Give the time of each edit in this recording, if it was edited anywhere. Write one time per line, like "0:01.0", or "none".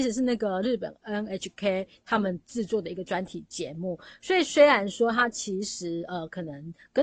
none